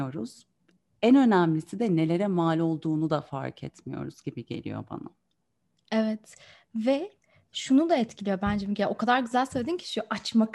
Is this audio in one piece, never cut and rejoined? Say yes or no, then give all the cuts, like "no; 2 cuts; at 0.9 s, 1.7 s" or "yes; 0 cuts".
yes; 0 cuts